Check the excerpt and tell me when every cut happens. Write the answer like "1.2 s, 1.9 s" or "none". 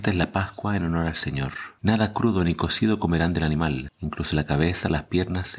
1.8 s, 3.9 s